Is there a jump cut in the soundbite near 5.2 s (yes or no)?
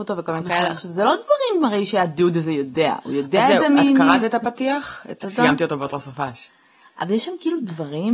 yes